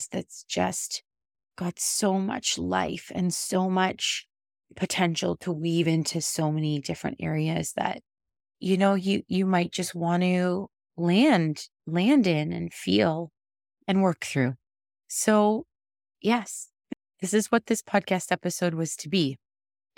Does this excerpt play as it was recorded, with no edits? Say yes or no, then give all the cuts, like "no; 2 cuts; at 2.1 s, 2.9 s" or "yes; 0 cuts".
yes; 0 cuts